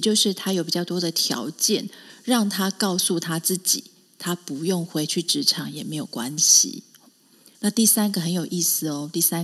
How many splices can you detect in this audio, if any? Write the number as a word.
one